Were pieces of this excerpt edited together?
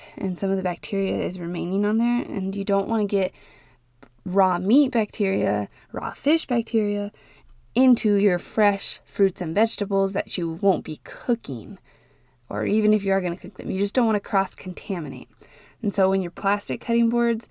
no; 0 cuts

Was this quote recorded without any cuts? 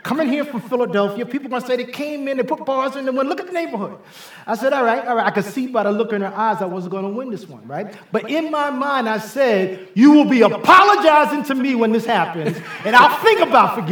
yes; 0 cuts

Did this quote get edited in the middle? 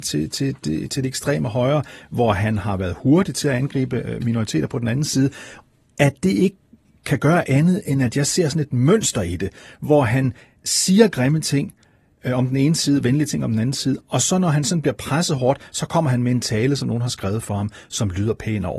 no; 0 cuts

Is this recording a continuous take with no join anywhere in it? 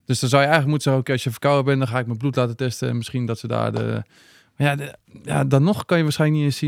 yes; 0 cuts

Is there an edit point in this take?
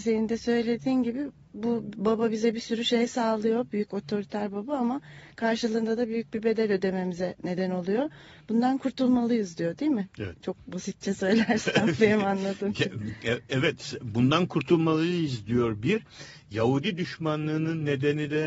no; 0 cuts

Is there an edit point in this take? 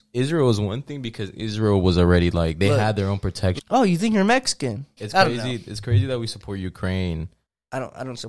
yes; 2 cuts; at 3.6 s, 5.0 s

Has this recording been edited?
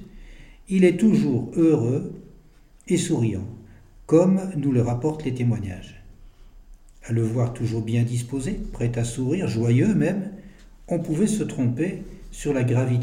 no; 0 cuts

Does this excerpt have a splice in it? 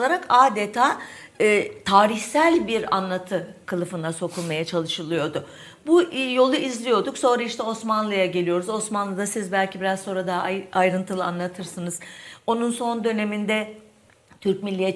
no; 0 cuts

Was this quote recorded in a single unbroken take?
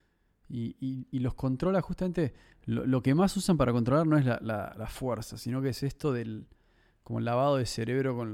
yes; 0 cuts

